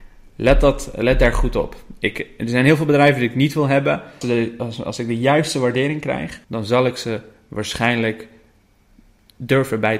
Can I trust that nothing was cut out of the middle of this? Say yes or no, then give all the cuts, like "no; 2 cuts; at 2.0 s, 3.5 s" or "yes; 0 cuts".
no; 2 cuts; at 4.2 s, 6.4 s